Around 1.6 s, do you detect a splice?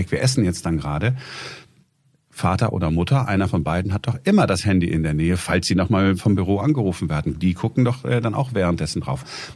no; 0 cuts

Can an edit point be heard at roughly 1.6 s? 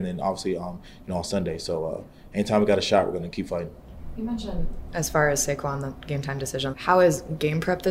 no; 1 cut; at 6.7 s

